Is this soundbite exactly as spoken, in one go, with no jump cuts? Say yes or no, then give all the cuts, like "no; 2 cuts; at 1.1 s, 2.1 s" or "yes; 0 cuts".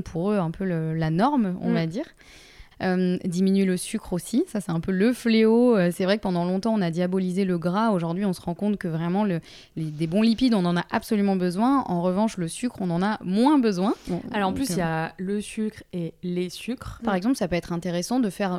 no; 2 cuts; at 2.7 s, 17.0 s